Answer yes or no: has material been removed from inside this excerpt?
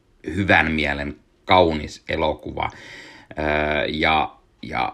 no